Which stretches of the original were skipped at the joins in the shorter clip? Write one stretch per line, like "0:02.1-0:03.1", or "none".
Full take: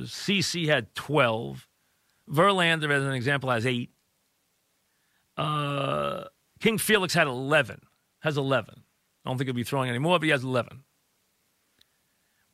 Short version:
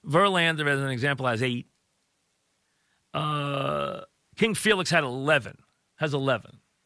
none